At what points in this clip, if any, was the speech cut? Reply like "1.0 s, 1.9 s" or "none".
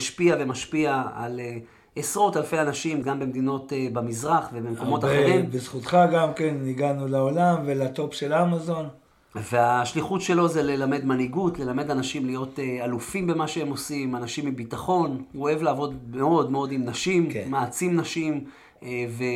3.0 s